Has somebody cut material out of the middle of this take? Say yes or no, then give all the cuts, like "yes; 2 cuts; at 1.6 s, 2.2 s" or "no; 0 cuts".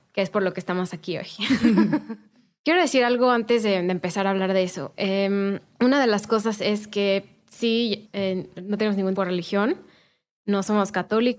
yes; 2 cuts; at 8.1 s, 9.1 s